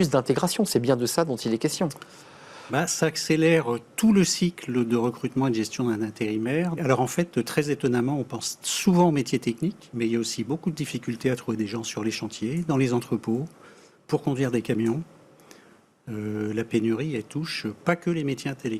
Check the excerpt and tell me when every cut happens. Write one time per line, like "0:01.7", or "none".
0:06.8